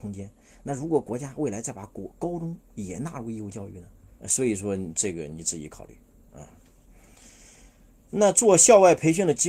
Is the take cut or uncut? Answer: cut